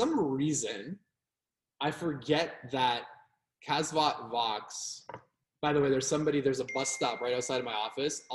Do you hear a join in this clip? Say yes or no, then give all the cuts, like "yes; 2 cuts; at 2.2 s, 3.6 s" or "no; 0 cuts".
no; 0 cuts